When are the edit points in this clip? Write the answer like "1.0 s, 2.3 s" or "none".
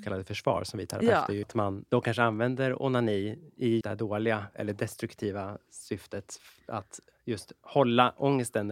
1.4 s, 3.8 s